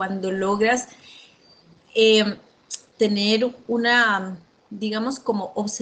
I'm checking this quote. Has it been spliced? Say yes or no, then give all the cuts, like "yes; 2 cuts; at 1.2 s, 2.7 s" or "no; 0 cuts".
no; 0 cuts